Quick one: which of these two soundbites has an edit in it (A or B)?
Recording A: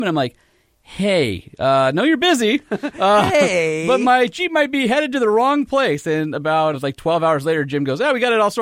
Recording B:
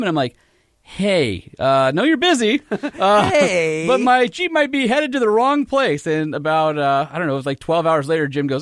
A